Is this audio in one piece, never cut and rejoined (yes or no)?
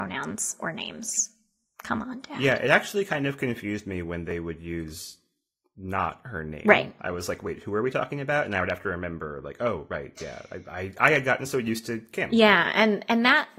yes